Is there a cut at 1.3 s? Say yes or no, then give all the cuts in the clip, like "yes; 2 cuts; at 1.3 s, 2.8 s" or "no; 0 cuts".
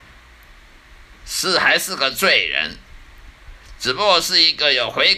no; 0 cuts